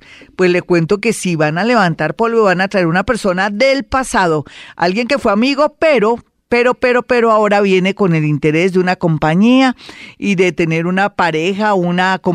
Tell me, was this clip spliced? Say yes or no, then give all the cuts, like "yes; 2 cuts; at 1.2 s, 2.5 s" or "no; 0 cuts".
no; 0 cuts